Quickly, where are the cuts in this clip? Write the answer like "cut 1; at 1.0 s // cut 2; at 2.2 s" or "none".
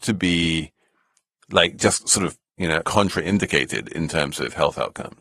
cut 1; at 2.8 s

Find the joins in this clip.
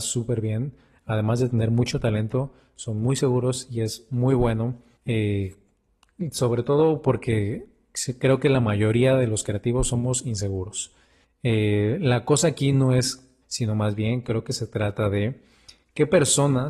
cut 1; at 5.0 s // cut 2; at 11.2 s // cut 3; at 13.4 s

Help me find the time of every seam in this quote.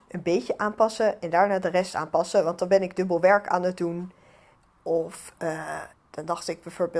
cut 1; at 5.9 s

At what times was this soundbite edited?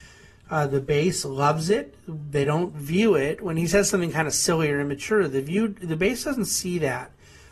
none

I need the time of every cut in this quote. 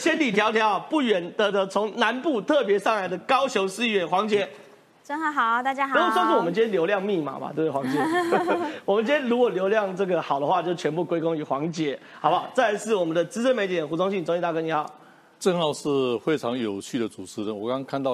cut 1; at 1.5 s

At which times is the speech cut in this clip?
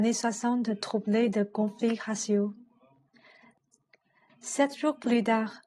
cut 1; at 4.3 s

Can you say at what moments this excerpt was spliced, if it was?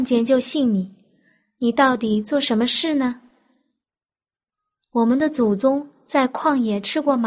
none

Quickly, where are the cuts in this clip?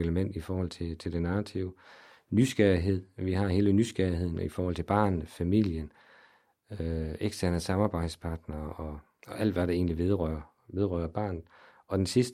none

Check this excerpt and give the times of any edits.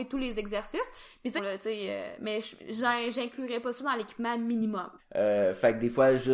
cut 1; at 1.4 s // cut 2; at 5.0 s

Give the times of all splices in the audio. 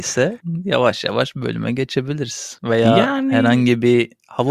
none

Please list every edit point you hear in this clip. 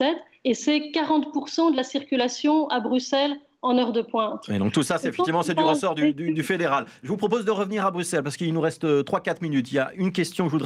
none

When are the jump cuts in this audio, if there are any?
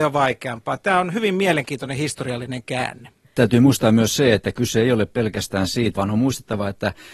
cut 1; at 3.2 s // cut 2; at 5.9 s

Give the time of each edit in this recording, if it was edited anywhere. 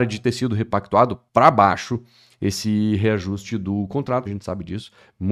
cut 1; at 1.3 s // cut 2; at 4.3 s

